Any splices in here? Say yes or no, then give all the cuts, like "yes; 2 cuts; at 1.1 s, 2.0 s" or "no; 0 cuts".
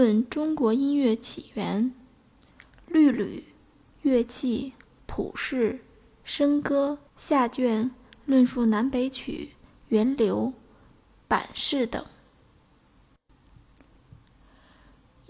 yes; 2 cuts; at 5.0 s, 7.1 s